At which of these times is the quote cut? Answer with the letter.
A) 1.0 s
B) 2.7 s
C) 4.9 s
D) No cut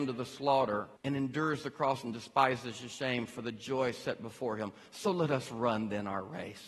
A